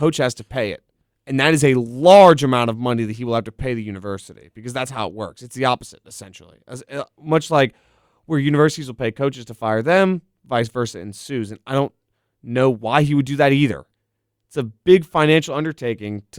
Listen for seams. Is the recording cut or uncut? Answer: uncut